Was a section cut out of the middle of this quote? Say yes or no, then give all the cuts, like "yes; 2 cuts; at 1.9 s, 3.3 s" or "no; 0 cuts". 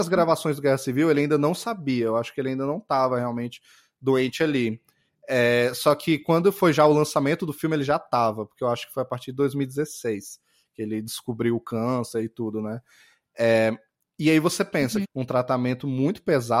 yes; 1 cut; at 15.0 s